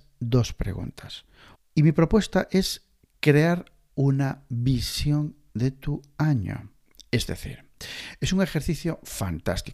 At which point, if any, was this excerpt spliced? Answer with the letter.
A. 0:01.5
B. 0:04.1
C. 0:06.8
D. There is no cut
A